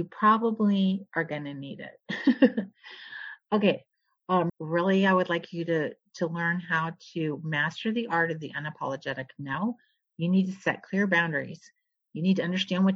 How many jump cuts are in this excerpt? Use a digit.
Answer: 1